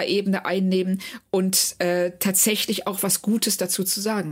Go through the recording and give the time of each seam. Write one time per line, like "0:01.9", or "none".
none